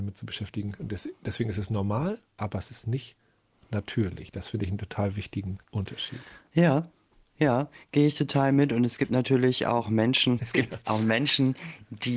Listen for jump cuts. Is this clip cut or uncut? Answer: cut